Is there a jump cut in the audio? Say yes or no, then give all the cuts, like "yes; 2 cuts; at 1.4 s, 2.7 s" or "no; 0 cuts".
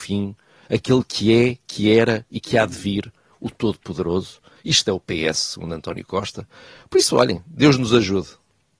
no; 0 cuts